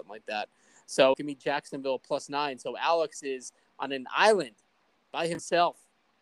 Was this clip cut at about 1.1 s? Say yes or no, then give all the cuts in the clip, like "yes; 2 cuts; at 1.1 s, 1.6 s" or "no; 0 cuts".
yes; 1 cut; at 1.1 s